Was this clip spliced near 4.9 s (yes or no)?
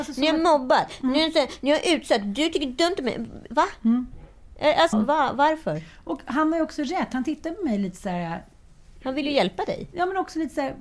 yes